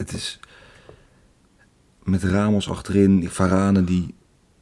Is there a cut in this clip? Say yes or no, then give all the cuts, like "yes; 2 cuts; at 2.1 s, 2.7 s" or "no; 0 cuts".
no; 0 cuts